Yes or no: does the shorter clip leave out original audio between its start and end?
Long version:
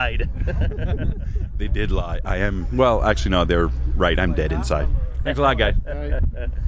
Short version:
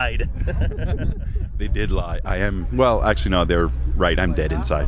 no